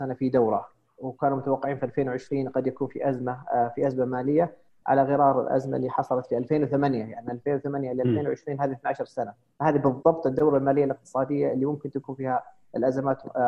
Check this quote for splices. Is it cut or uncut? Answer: uncut